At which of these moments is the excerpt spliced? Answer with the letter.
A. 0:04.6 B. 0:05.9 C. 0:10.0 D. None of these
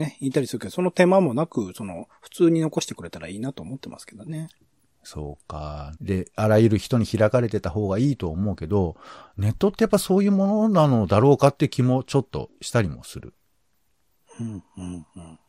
B